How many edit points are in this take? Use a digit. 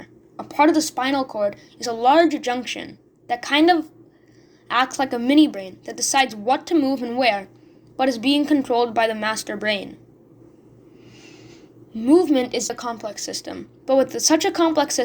1